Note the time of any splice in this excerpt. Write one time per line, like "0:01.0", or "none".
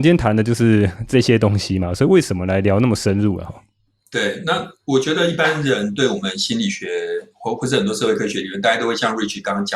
none